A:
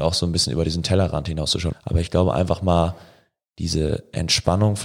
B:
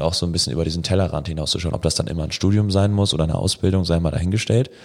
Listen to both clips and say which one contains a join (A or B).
A